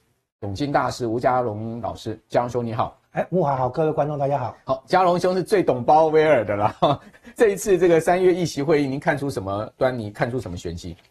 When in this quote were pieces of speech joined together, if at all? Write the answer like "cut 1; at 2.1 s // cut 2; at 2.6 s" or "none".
none